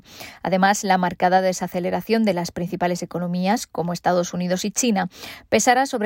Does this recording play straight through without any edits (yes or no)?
yes